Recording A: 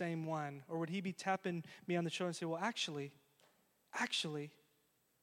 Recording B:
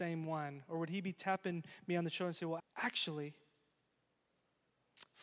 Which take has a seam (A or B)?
B